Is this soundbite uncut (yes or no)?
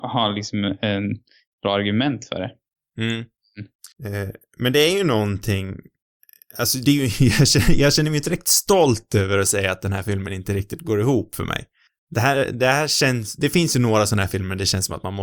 no